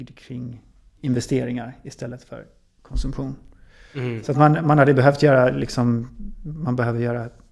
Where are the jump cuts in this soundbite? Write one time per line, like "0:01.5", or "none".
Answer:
none